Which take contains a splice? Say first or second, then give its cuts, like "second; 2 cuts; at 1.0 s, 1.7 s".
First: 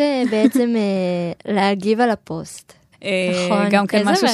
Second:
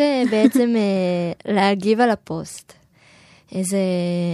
first; 1 cut; at 2.9 s